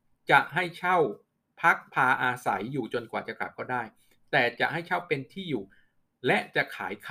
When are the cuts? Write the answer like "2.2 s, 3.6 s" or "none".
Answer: none